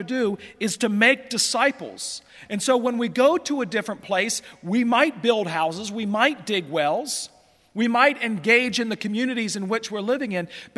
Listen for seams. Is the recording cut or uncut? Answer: uncut